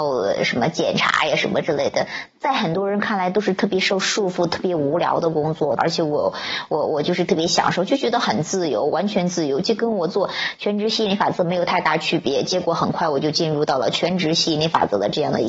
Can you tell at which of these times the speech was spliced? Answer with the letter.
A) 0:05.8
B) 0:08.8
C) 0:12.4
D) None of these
A